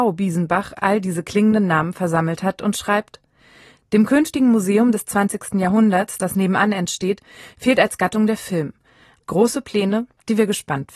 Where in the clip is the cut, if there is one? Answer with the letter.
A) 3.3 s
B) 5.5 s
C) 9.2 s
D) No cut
C